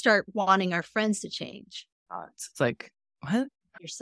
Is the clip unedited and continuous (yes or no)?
no